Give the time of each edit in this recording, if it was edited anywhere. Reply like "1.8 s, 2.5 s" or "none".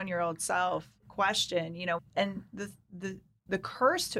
2.0 s